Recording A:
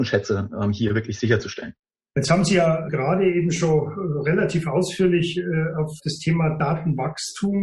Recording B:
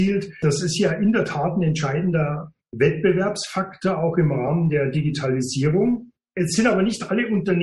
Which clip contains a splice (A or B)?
A